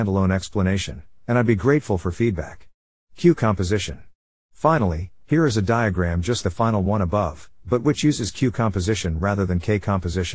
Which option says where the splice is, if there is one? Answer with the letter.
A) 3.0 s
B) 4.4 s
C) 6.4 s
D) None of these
C